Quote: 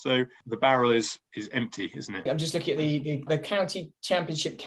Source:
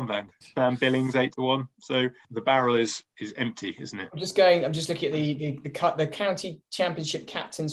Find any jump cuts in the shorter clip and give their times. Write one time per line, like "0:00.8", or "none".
0:02.3
0:03.3